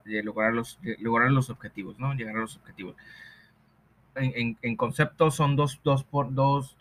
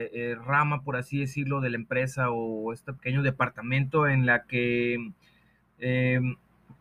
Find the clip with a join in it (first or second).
first